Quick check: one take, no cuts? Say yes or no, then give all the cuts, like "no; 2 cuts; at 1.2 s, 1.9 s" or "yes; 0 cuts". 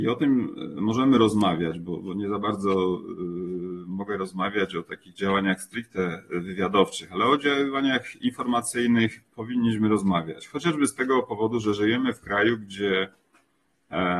yes; 0 cuts